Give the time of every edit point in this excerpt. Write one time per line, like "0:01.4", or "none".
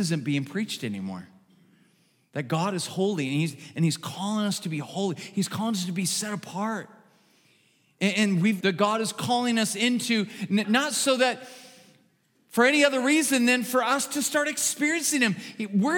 0:08.6
0:10.6